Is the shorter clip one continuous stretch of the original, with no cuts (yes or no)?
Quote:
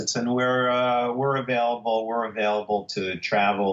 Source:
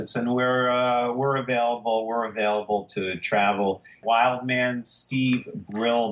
yes